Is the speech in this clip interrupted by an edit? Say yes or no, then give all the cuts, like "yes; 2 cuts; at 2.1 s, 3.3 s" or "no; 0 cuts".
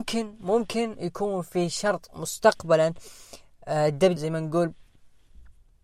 yes; 1 cut; at 4.2 s